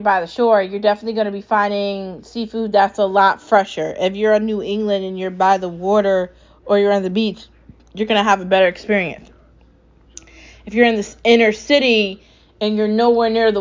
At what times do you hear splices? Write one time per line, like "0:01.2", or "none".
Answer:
none